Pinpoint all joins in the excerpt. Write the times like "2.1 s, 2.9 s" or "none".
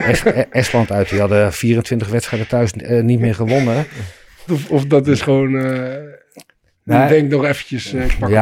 4.5 s